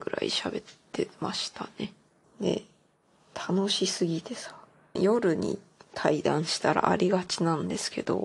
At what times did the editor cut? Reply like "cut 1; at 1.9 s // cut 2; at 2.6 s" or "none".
cut 1; at 2.2 s // cut 2; at 5.0 s